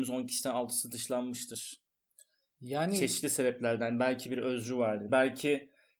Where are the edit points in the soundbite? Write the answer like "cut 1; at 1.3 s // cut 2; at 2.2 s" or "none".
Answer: cut 1; at 5.1 s